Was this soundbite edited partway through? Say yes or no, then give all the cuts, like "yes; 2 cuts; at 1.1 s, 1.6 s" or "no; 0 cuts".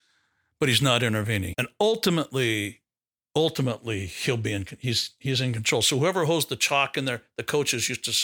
yes; 1 cut; at 1.5 s